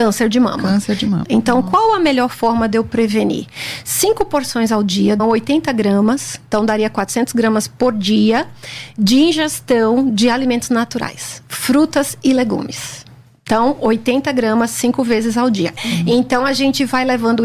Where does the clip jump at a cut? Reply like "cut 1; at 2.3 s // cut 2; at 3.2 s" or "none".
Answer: cut 1; at 1.2 s // cut 2; at 5.2 s // cut 3; at 15.8 s